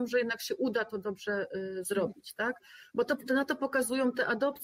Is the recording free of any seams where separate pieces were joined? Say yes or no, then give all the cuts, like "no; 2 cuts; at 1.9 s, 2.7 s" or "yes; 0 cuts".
no; 1 cut; at 2.9 s